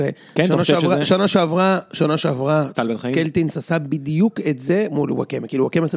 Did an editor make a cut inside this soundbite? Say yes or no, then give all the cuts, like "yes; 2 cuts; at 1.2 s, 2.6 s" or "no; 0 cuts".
no; 0 cuts